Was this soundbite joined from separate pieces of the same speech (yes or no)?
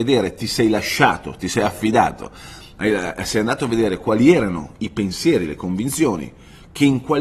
no